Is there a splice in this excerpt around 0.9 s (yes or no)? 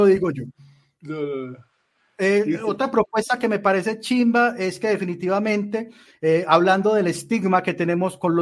no